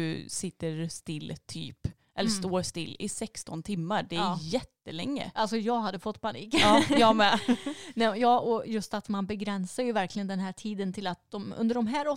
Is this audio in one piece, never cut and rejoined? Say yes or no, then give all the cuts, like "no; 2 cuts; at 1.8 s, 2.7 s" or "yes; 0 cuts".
yes; 0 cuts